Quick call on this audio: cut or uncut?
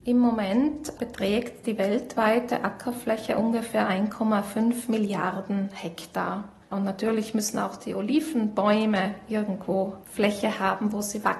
cut